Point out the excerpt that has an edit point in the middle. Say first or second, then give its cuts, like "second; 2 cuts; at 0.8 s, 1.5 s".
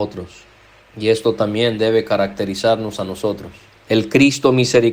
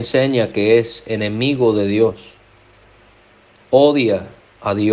first; 1 cut; at 3.8 s